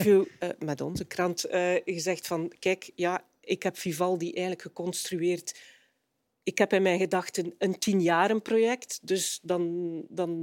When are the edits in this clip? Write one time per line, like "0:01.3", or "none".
none

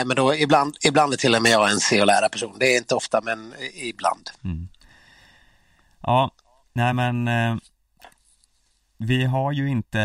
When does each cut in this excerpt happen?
none

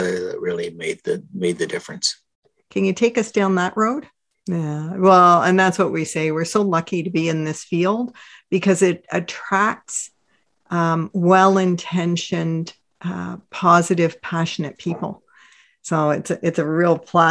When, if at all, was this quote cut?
0:02.6
0:04.3

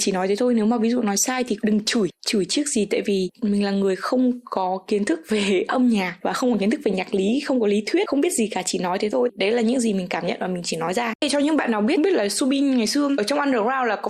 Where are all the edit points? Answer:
none

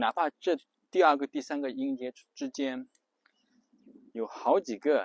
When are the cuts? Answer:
0:01.3

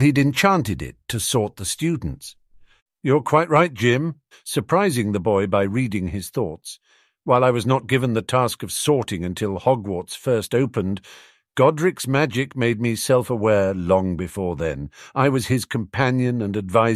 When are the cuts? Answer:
0:04.3

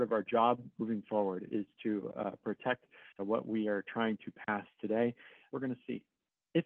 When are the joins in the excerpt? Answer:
0:03.2
0:05.5

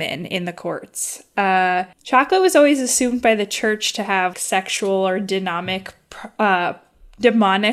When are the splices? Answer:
0:01.9
0:04.3

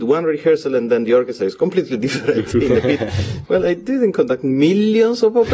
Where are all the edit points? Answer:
0:03.4

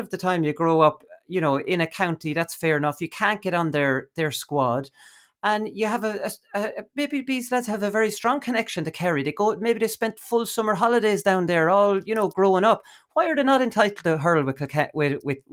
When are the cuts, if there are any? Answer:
none

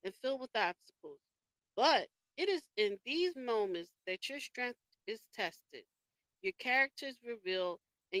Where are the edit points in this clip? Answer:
0:03.3

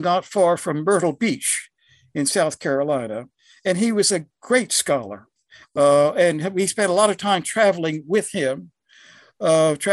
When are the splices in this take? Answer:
0:05.6

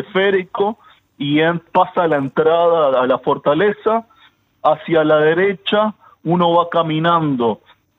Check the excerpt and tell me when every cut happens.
none

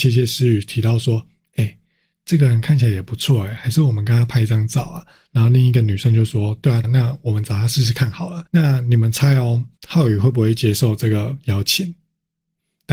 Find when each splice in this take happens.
0:06.8
0:08.5
0:09.8

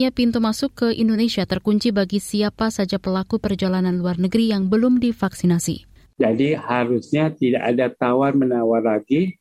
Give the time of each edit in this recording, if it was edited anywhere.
0:06.1

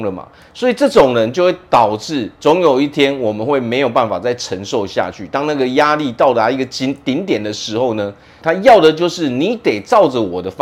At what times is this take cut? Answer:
0:08.4

